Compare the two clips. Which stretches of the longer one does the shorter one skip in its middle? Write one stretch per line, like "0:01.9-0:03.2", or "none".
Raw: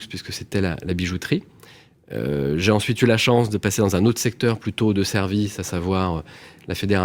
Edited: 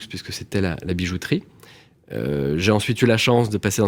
none